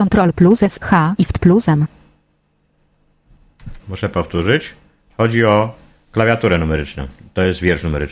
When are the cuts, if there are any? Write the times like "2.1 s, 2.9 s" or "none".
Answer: 3.8 s